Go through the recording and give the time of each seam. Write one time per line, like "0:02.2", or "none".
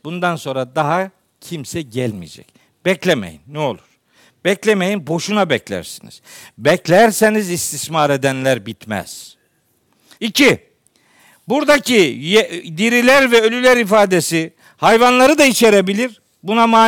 0:10.1